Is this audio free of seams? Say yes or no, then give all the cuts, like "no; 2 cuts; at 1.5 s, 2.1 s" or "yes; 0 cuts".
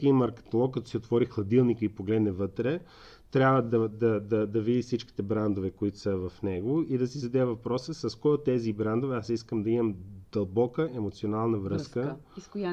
yes; 0 cuts